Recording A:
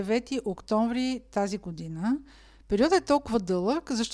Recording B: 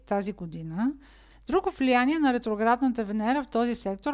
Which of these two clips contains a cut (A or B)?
B